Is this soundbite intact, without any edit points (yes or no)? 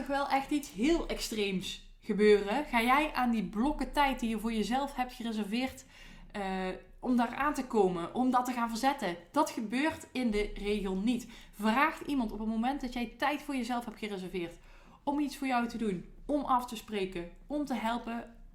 yes